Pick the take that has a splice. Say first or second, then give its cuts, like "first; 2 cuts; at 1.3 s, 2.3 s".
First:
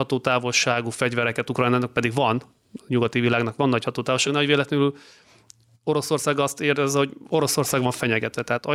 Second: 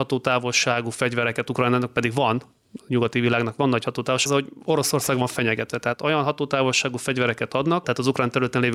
second; 2 cuts; at 4.3 s, 7.8 s